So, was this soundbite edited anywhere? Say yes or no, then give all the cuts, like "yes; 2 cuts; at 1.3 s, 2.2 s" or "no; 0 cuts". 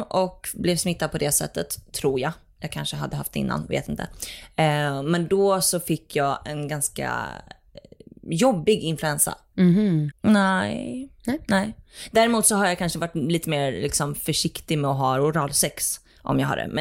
yes; 1 cut; at 10.1 s